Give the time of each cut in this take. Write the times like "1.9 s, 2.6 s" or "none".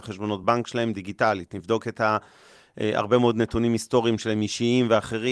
none